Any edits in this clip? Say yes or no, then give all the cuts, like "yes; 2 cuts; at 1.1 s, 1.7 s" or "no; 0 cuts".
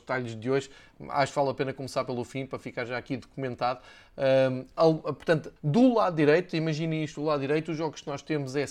yes; 1 cut; at 5.6 s